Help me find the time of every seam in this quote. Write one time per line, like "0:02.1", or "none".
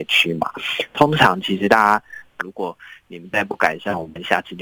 0:02.4